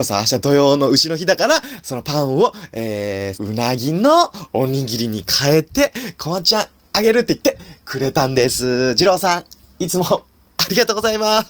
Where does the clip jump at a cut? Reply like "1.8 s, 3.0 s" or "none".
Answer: 3.3 s